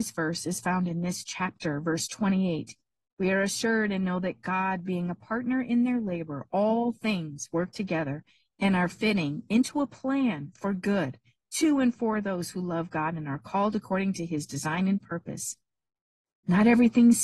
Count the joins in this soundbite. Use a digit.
0